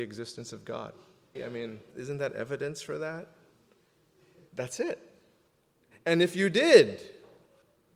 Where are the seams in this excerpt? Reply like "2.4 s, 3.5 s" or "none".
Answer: 1.4 s, 4.5 s

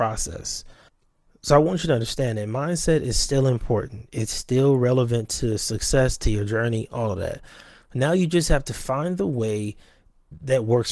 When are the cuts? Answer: none

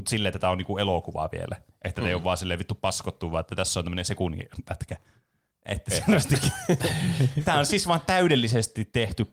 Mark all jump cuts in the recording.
5.5 s

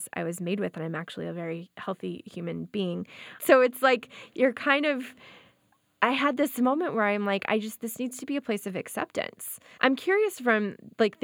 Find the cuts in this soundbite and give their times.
3.4 s, 9.8 s

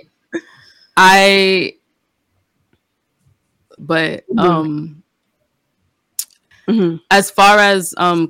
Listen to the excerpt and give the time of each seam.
3.8 s, 6.5 s

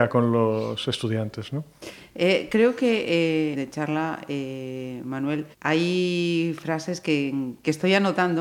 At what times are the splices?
3.5 s, 5.5 s

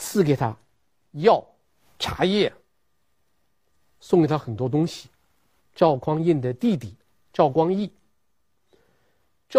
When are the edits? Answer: 5.6 s

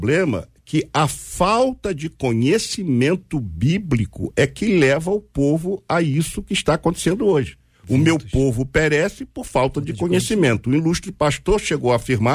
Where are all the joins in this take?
none

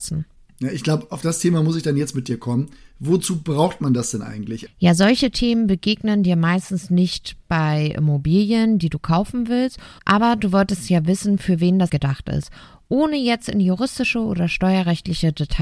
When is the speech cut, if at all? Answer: 4.7 s, 10.0 s, 11.9 s

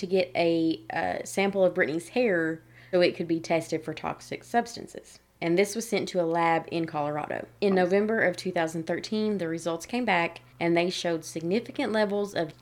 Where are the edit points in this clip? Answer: 2.9 s, 7.6 s, 10.5 s

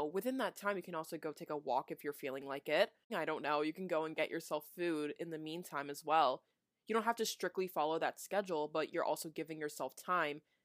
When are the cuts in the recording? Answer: 3.1 s

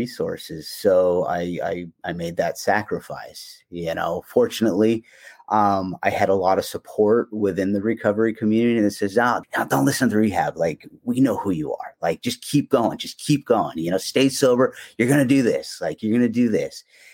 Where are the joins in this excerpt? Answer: 9.4 s

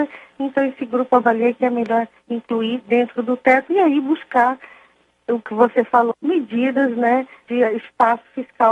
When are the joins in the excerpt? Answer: 6.1 s, 7.5 s

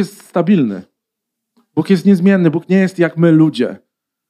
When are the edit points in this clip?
none

